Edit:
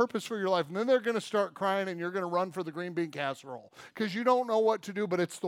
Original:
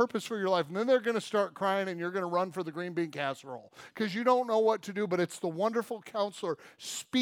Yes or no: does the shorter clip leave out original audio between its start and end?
no